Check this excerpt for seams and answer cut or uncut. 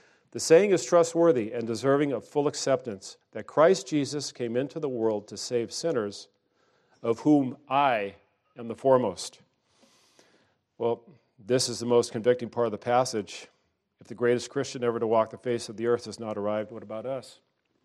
uncut